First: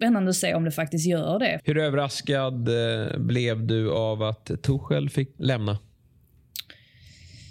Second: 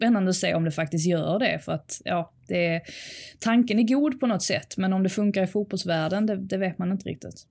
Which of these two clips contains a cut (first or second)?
first